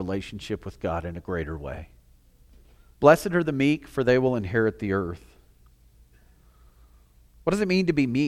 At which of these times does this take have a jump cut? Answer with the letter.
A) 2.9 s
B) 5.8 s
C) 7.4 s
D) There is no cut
A